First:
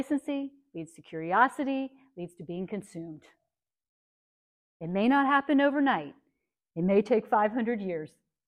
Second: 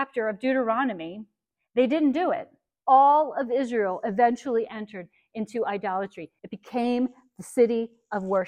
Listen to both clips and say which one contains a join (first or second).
second